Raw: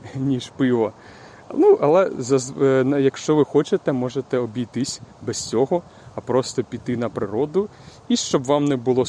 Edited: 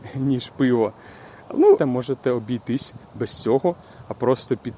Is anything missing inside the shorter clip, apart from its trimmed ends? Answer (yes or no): yes